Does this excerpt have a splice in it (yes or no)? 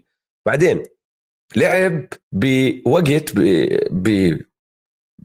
yes